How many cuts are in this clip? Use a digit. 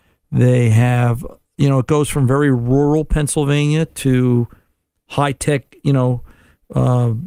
0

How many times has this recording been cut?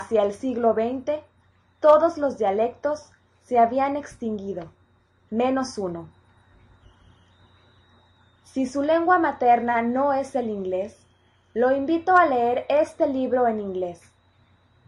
0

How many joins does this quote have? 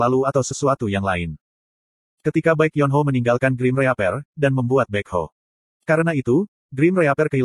1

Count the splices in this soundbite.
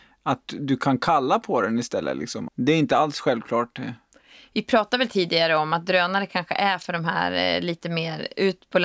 1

